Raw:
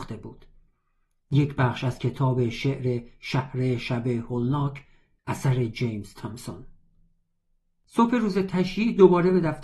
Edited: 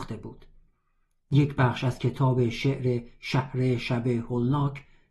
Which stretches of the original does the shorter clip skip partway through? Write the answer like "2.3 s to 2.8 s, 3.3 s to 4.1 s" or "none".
none